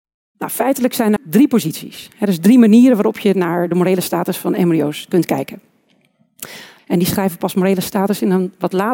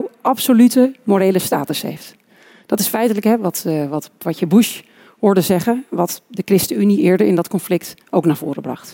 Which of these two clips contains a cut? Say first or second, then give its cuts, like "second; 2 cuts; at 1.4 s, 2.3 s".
first; 2 cuts; at 1.2 s, 6.8 s